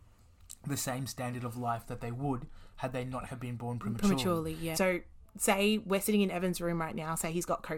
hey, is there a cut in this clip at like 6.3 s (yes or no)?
no